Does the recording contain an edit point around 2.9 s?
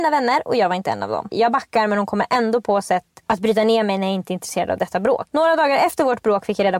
no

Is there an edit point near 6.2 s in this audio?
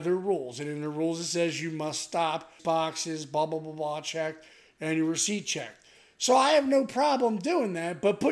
no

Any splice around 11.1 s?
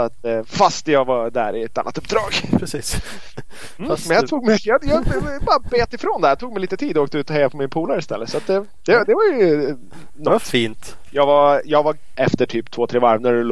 yes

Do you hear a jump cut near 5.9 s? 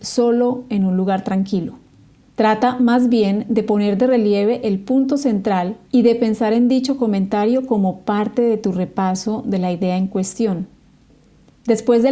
yes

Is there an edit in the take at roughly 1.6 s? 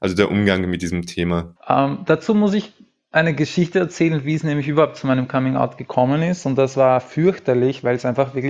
yes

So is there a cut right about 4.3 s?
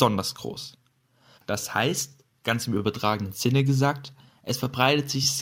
no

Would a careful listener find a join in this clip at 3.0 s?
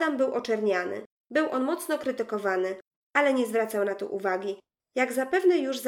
no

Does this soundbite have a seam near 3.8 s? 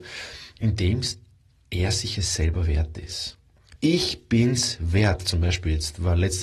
yes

